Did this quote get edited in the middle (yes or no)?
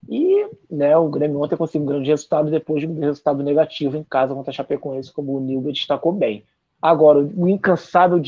no